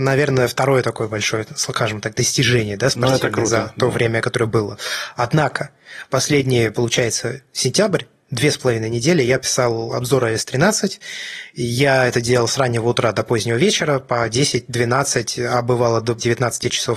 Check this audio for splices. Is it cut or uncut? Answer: uncut